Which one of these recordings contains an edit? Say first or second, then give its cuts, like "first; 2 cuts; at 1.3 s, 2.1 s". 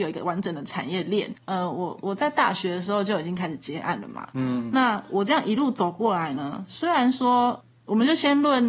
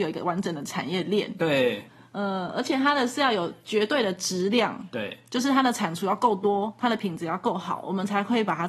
first; 1 cut; at 1.3 s